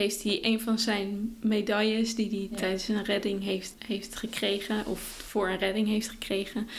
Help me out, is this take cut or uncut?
cut